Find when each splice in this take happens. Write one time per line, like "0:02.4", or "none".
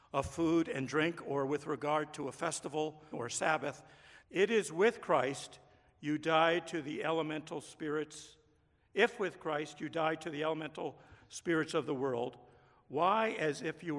0:03.1
0:04.2